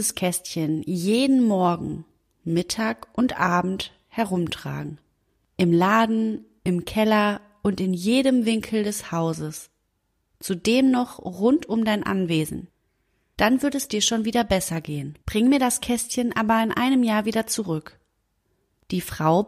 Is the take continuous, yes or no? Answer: no